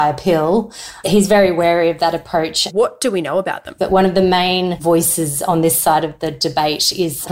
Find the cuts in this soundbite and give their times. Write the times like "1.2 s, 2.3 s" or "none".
2.7 s, 3.8 s